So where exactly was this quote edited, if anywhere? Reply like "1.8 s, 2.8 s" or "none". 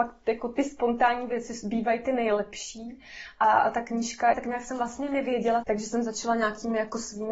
4.3 s, 5.6 s